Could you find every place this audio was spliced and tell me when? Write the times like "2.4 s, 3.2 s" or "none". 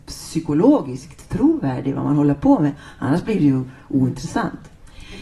none